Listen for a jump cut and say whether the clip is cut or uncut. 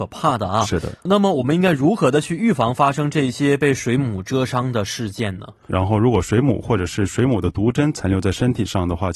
cut